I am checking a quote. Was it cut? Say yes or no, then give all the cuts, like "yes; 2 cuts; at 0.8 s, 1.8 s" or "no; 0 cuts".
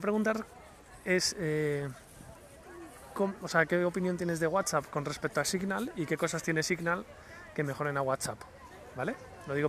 no; 0 cuts